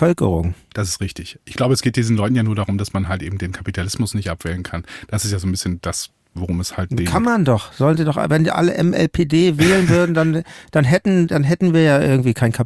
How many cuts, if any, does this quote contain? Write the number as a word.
zero